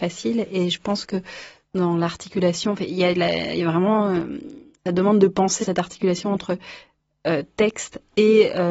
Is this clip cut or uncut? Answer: cut